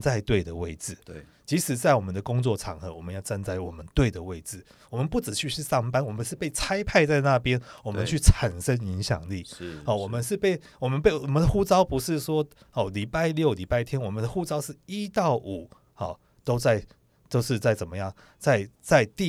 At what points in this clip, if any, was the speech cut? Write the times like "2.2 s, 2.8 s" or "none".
none